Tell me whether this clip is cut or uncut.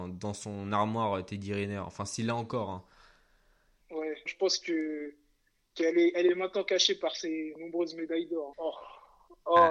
cut